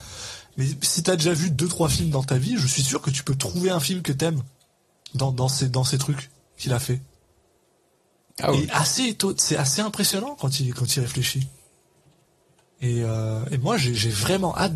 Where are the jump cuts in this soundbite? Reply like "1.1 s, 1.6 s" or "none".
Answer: 8.7 s